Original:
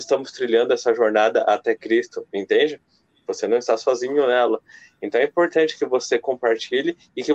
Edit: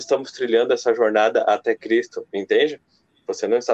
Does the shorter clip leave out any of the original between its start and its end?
no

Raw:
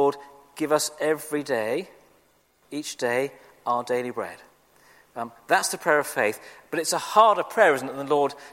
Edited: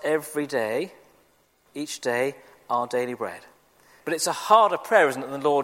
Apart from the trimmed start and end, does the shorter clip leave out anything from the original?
yes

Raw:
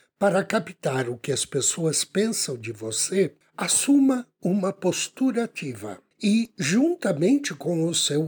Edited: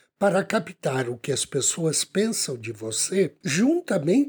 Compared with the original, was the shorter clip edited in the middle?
yes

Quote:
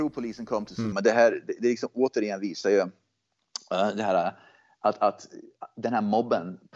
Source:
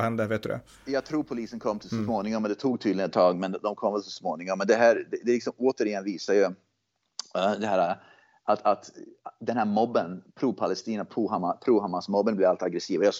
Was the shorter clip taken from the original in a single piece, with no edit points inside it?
no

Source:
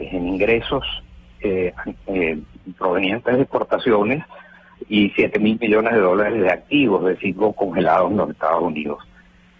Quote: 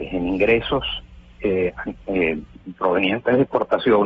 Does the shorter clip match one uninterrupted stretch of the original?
yes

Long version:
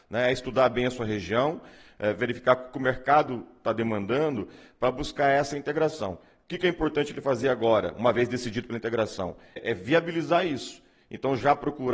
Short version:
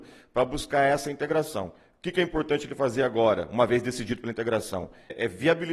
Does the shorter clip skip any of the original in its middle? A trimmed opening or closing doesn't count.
no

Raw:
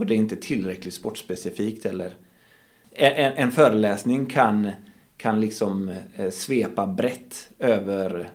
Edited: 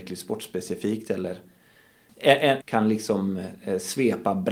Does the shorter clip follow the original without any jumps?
no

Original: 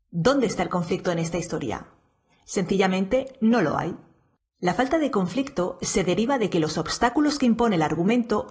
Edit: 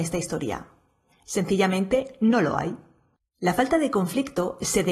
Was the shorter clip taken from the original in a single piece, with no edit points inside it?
yes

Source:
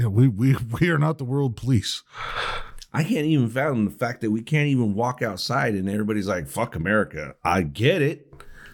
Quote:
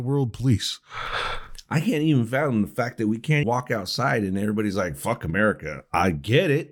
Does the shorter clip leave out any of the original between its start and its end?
yes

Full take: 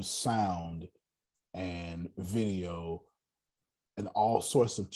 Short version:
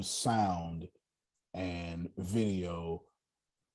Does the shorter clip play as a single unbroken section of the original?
yes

